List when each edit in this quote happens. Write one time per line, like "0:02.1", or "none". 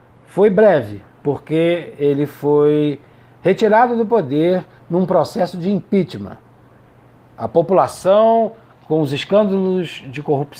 none